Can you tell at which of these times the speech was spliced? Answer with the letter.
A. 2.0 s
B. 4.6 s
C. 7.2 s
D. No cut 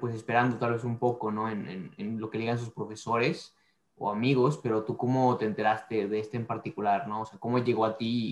D